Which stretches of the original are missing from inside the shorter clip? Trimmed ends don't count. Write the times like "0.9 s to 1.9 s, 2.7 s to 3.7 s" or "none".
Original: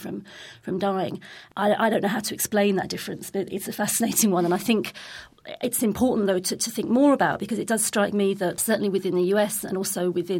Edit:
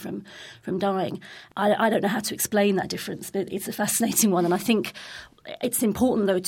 none

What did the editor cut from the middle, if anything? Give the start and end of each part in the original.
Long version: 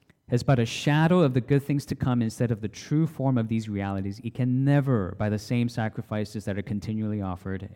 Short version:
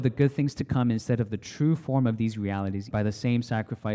4.2 s to 5.2 s

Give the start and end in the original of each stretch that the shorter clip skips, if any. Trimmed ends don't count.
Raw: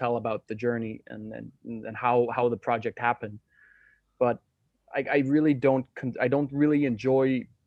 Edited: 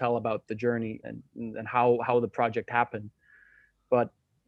1.0 s to 1.3 s

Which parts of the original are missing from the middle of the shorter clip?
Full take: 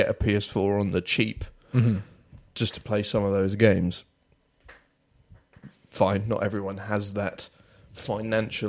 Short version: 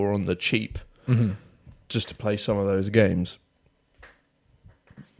none

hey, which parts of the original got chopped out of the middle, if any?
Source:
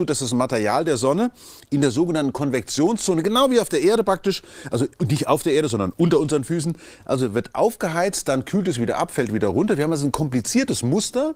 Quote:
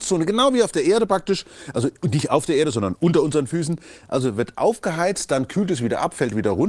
none

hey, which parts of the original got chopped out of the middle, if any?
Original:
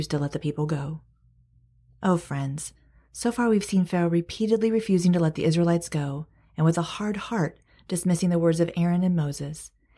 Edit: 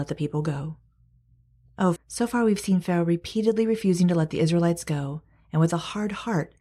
2.2 s to 3.0 s

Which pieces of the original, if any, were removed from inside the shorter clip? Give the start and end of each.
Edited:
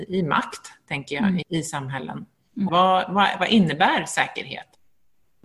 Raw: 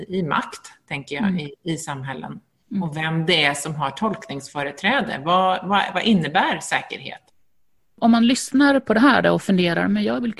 1.4 s to 1.6 s, 2.8 s to 5.2 s

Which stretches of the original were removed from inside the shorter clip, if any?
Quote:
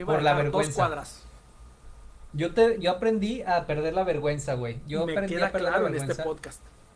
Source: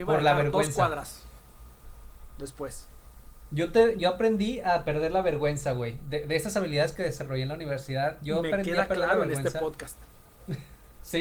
2.3 s to 3.5 s, 6.0 s to 8.2 s

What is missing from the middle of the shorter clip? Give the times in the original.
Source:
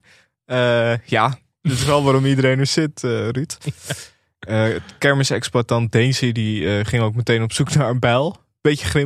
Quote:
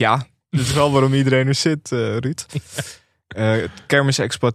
none

